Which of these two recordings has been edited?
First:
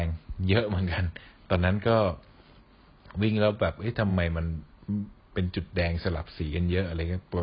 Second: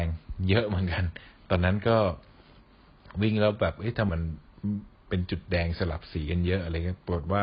second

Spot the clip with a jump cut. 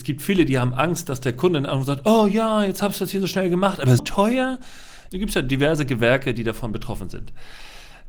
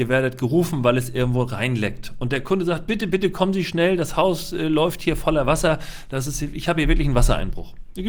first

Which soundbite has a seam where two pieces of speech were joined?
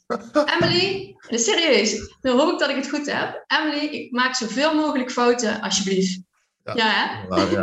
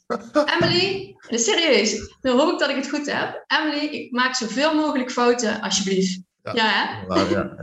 second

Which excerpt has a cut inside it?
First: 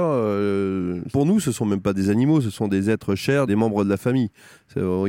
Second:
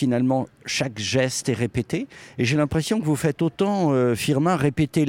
first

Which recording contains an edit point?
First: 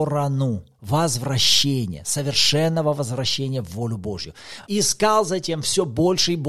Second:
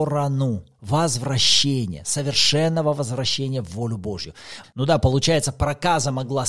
second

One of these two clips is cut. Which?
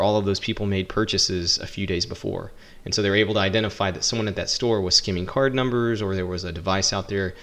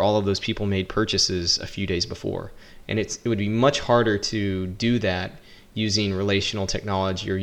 second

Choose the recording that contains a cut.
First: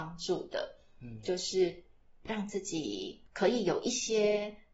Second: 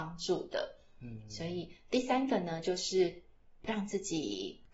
first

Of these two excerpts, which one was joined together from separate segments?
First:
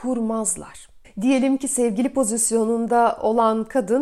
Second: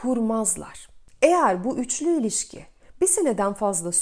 first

